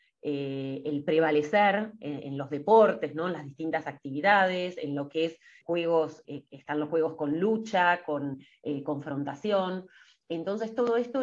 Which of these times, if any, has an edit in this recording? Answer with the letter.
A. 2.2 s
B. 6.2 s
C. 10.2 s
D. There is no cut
B